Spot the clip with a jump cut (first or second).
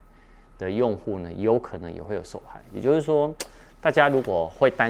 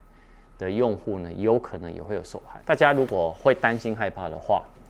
second